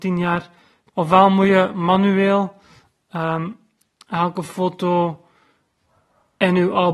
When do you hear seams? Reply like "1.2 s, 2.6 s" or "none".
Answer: 0.9 s